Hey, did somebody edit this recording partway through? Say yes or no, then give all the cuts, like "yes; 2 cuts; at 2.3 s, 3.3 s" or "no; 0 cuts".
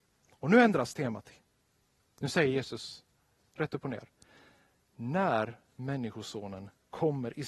no; 0 cuts